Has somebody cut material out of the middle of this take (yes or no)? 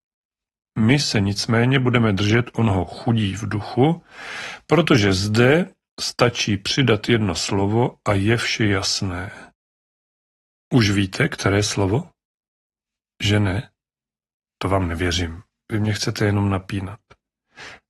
no